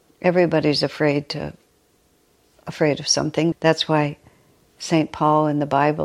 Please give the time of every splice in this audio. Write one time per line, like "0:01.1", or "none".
0:03.5

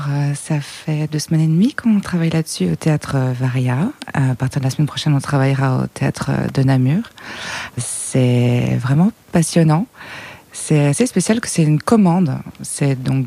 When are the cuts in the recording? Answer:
none

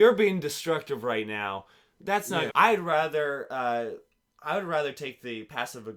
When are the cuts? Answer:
0:02.5

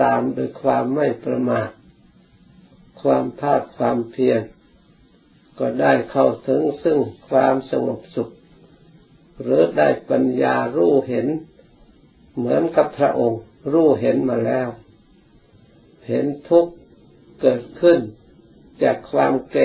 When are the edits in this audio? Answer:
none

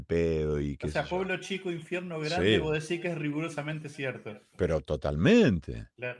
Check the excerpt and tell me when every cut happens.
none

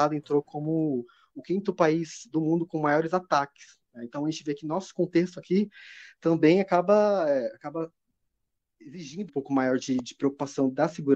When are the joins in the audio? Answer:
0:09.3

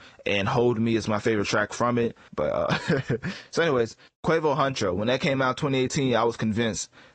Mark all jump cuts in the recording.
0:02.3
0:04.1

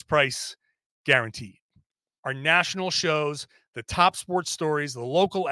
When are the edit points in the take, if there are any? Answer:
0:02.2

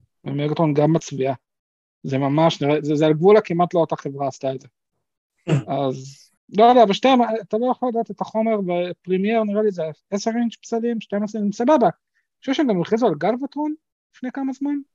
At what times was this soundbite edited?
0:06.4

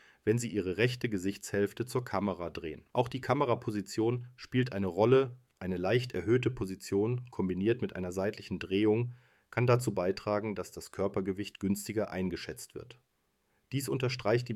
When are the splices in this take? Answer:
0:02.9

